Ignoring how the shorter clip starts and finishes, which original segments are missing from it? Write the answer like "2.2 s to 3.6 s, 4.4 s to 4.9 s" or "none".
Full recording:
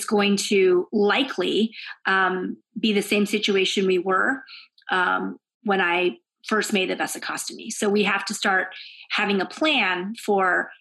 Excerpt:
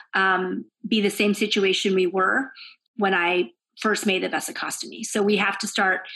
4.8 s to 5.5 s